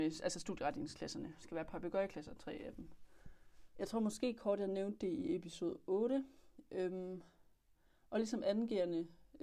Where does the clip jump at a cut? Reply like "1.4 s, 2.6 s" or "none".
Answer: 3.7 s